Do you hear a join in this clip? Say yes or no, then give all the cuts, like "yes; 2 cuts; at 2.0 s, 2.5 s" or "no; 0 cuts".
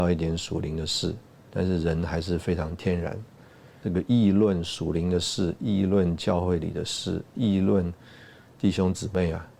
yes; 1 cut; at 3.8 s